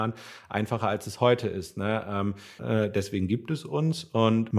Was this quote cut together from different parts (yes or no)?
yes